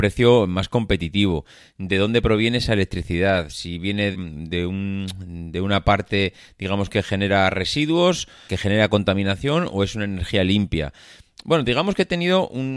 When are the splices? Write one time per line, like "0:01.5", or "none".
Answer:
0:04.1
0:08.5